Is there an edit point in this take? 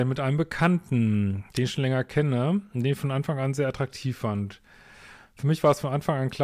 no; 0 cuts

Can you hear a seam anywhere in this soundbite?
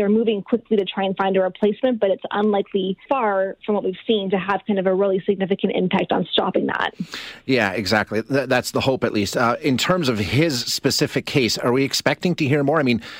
yes; 1 cut; at 3.1 s

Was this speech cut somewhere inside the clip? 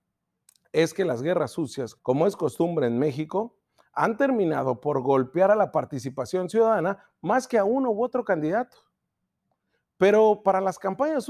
yes; 1 cut; at 2.0 s

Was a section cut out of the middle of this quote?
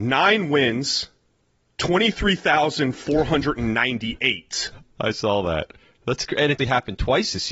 yes; 1 cut; at 6.6 s

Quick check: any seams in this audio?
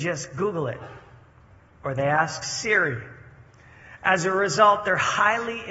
no; 0 cuts

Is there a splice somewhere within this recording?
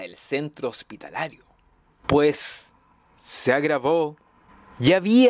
yes; 1 cut; at 2.0 s

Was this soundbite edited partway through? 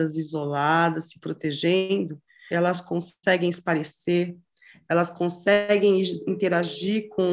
yes; 1 cut; at 2.5 s

